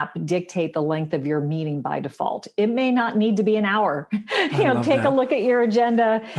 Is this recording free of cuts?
yes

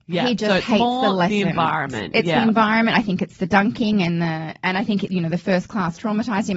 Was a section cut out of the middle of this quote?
no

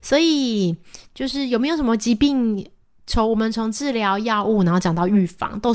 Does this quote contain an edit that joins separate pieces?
no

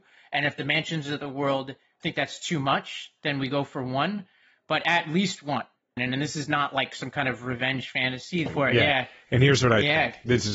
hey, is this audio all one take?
no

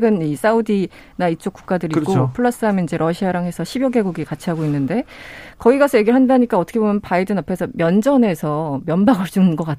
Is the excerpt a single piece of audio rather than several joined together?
yes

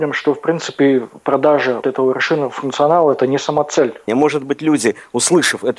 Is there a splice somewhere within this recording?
yes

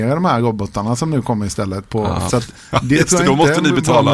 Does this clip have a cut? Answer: yes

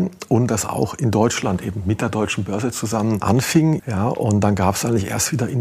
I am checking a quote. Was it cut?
yes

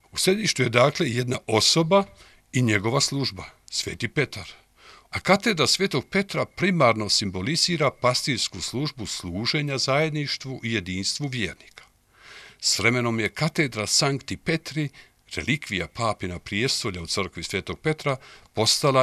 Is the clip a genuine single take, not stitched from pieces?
no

